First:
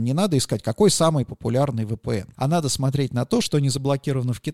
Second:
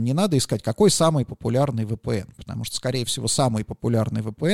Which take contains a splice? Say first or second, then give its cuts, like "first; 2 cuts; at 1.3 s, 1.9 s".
first; 2 cuts; at 2.3 s, 3.4 s